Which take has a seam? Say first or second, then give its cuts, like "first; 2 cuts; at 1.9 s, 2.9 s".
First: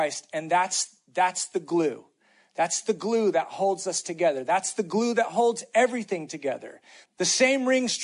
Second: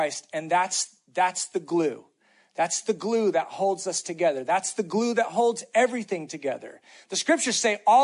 first; 1 cut; at 7.1 s